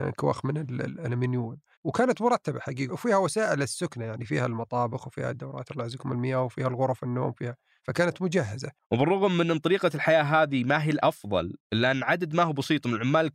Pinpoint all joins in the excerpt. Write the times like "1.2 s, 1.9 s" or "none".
2.9 s

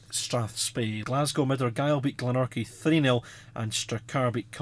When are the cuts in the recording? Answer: 1.0 s

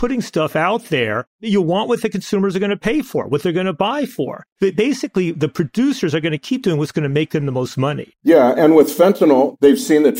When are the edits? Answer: 4.5 s, 8.1 s

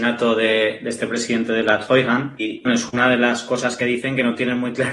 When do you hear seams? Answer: 2.6 s

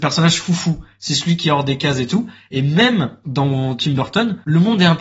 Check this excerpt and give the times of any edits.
none

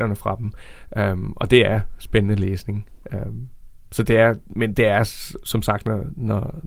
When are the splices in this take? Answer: 3.8 s

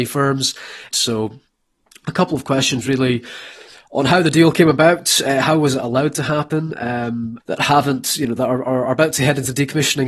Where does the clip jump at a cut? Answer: 0.9 s, 7.4 s

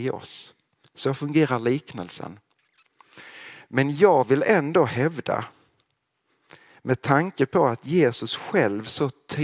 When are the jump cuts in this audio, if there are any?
none

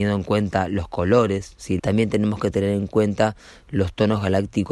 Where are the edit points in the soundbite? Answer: 1.8 s

